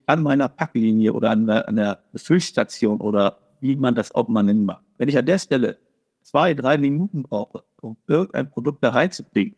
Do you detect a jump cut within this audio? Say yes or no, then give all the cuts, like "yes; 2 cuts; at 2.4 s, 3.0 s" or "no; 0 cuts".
no; 0 cuts